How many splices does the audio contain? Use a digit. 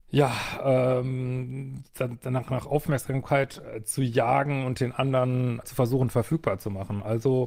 1